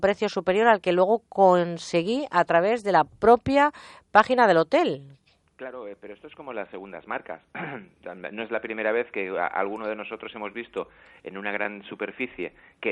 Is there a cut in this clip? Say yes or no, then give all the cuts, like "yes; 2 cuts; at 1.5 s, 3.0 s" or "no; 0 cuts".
no; 0 cuts